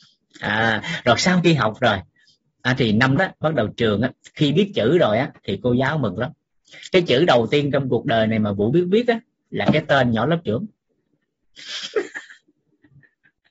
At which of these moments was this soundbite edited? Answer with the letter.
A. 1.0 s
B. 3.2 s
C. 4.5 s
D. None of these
B